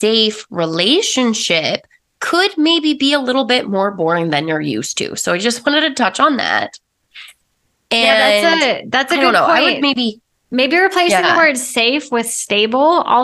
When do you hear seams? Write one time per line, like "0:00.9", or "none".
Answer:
none